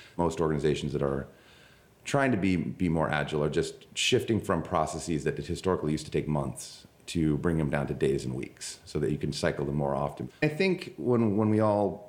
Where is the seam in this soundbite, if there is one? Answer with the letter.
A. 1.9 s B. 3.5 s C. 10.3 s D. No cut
C